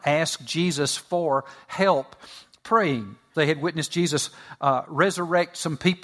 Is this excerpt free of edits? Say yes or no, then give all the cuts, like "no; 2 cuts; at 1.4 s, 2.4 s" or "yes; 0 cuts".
no; 1 cut; at 3.3 s